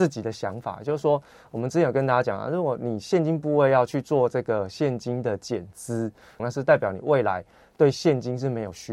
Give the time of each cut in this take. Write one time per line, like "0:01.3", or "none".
0:06.4

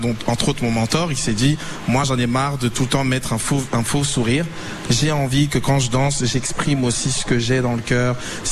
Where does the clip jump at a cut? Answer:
none

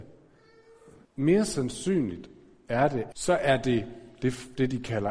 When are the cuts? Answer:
0:01.0
0:03.1

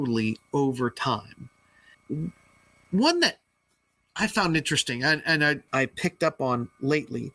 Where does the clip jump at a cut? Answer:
0:01.9
0:05.7

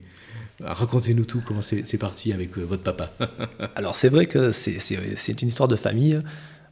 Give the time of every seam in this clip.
none

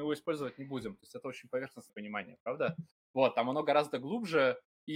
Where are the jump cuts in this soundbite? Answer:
none

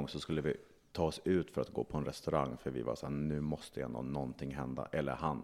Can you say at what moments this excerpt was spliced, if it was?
none

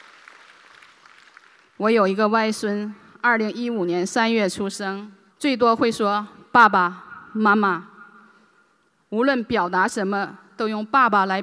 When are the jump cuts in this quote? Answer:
0:05.3

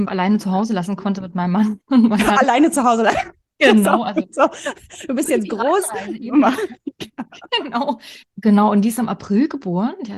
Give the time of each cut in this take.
0:07.1
0:08.2

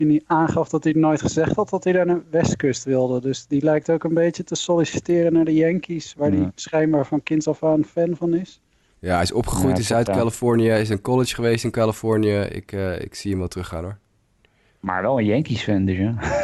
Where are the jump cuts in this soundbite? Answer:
none

